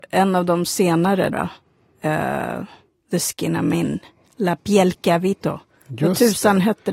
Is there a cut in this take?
yes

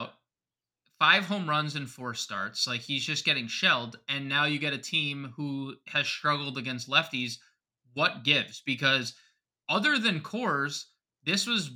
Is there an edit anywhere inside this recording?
no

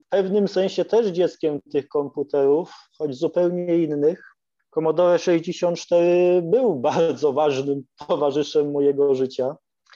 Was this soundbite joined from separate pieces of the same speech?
no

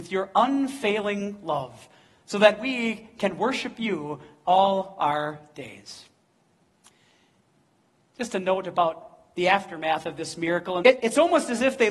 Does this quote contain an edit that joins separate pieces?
yes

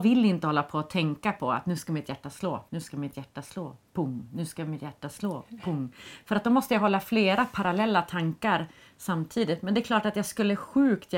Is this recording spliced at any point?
yes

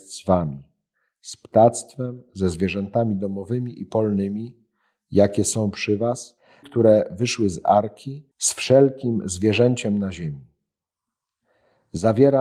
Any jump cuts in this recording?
yes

